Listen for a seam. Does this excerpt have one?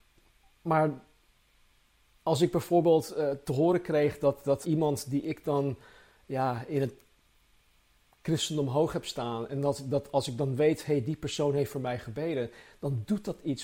yes; 1 cut; at 4.6 s

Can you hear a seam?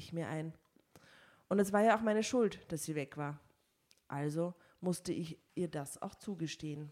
no; 0 cuts

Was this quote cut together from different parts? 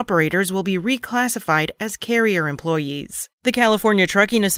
yes; 1 cut; at 3.3 s

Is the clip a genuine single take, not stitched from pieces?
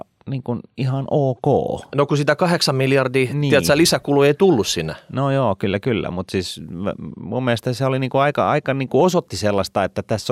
yes; 0 cuts

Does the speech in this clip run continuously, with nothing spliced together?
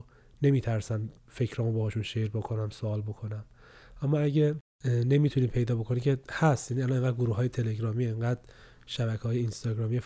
no; 1 cut; at 1.2 s

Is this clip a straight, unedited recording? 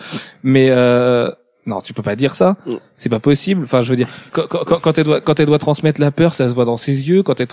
no; 1 cut; at 4.3 s

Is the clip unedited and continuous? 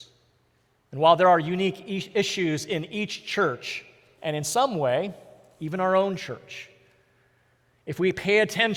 no; 1 cut; at 4.2 s

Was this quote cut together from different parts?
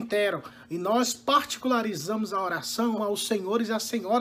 yes; 1 cut; at 3.0 s

